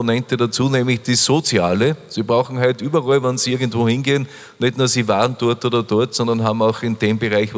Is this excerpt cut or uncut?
uncut